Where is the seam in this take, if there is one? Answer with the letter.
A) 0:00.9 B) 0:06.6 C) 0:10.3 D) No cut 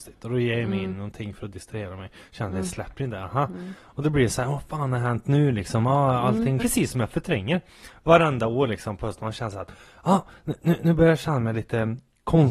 B